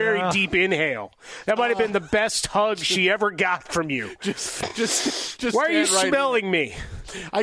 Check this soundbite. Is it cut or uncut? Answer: uncut